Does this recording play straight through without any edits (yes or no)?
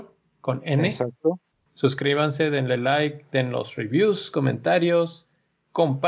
no